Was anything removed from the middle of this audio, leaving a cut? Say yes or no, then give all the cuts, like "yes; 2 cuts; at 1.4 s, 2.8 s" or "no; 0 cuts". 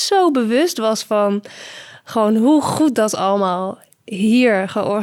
no; 0 cuts